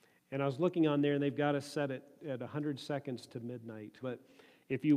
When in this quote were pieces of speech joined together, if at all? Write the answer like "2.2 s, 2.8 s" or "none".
4.0 s

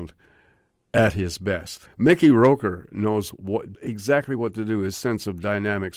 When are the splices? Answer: 1.9 s, 3.7 s

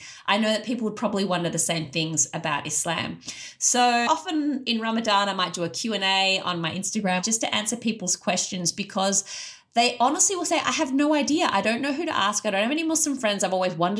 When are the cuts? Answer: 4.1 s

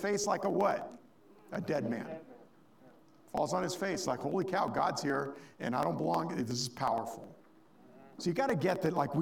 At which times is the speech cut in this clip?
none

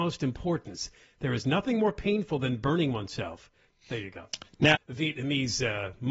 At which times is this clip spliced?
3.7 s, 4.7 s

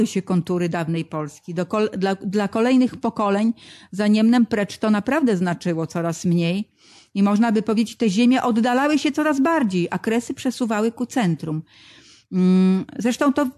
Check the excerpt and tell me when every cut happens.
none

